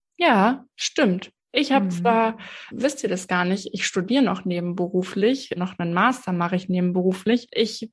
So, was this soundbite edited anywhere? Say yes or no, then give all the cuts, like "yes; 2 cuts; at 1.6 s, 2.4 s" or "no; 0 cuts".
yes; 2 cuts; at 2.7 s, 5.6 s